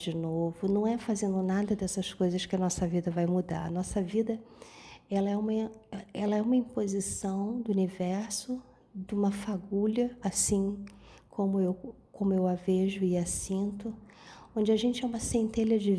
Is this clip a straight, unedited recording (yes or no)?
yes